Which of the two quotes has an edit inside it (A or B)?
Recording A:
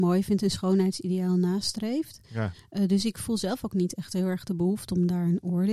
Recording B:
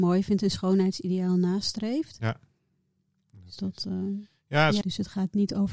B